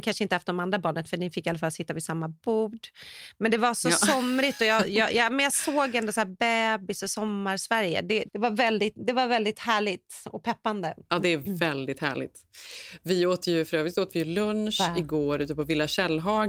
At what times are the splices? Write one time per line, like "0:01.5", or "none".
0:08.3